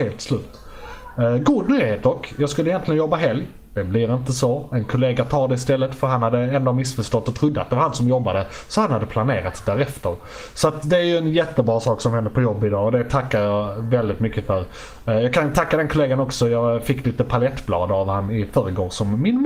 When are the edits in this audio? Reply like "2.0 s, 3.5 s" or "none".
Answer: none